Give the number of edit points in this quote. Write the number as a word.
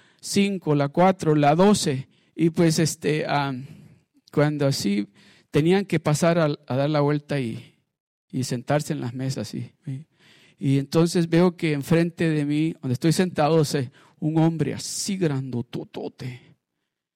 one